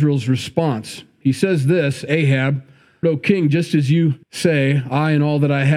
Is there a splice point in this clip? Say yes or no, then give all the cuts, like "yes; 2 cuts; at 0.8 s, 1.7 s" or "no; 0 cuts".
yes; 2 cuts; at 3.0 s, 4.2 s